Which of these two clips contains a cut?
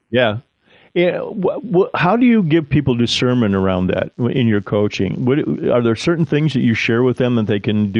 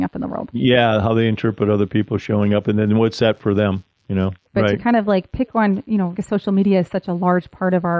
second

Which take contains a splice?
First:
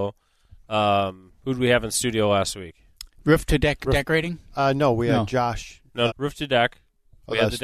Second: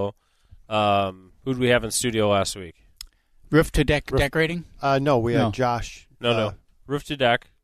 first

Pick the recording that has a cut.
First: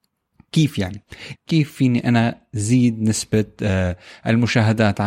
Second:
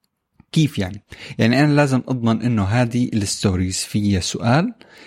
first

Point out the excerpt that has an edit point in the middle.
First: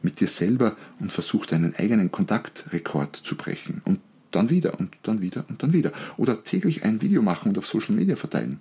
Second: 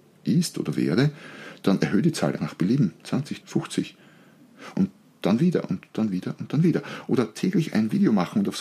second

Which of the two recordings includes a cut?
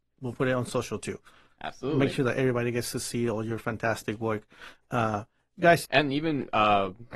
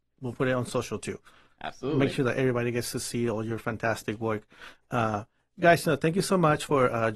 first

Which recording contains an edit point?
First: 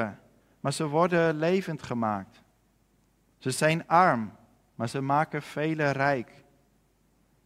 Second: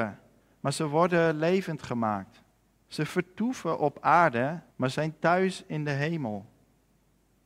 second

